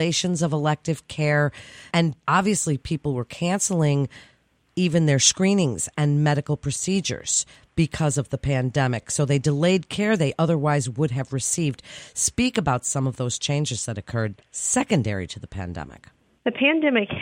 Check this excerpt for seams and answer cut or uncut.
uncut